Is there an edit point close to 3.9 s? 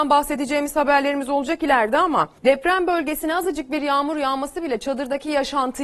no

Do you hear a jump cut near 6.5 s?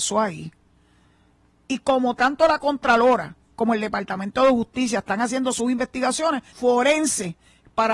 yes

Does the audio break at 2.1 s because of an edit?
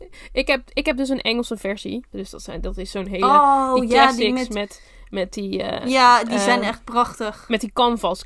yes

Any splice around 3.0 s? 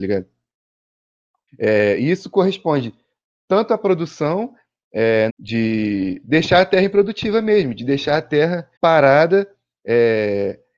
no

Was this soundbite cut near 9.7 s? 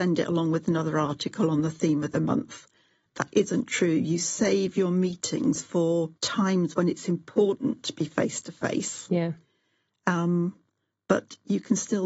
no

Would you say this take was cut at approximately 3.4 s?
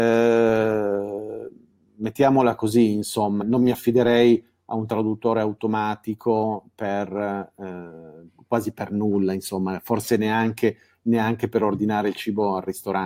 yes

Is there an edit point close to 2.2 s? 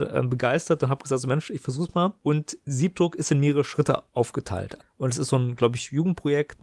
no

